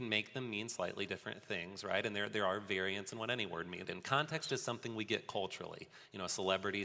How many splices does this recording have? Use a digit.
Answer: 1